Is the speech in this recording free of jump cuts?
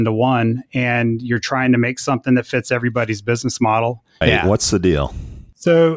no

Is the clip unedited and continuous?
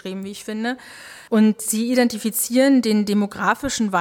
no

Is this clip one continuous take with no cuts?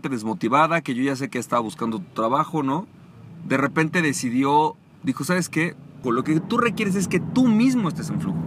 no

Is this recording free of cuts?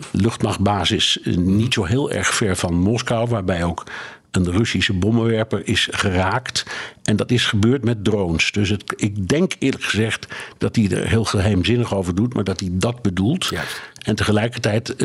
yes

